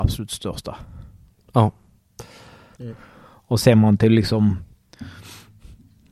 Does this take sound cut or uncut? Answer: cut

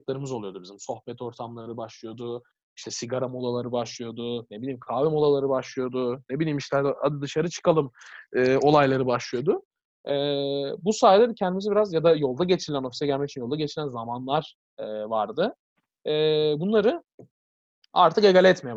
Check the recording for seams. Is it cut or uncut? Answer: uncut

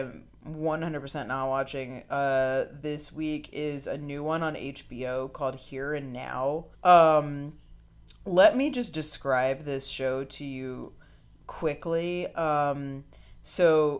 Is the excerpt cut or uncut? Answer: cut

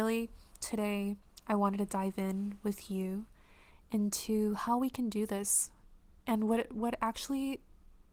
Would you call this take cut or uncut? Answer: uncut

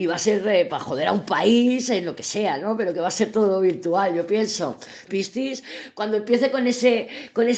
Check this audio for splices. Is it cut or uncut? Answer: cut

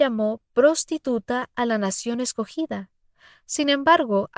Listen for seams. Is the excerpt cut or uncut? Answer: uncut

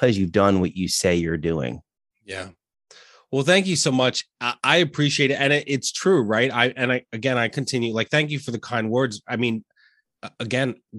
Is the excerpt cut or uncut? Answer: uncut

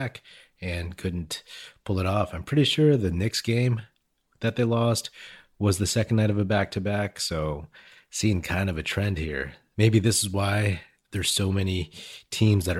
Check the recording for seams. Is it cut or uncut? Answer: uncut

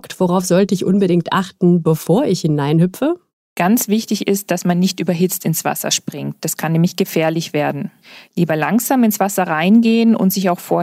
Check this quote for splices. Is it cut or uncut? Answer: uncut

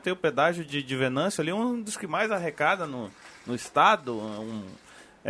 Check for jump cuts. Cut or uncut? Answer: uncut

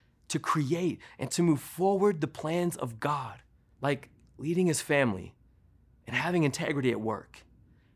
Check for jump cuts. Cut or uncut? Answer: cut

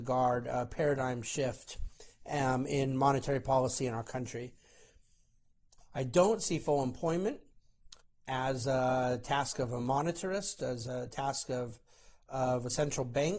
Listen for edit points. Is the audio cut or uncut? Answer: cut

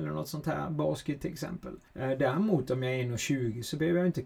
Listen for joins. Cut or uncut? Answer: cut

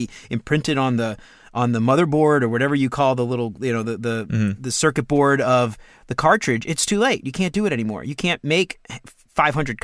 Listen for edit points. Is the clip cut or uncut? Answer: uncut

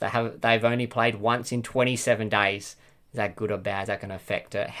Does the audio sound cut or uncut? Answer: uncut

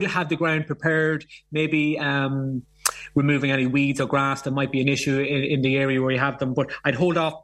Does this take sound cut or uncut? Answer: uncut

